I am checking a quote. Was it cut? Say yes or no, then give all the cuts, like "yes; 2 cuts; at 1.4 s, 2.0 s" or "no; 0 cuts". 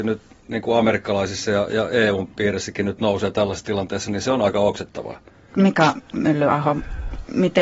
yes; 1 cut; at 5.5 s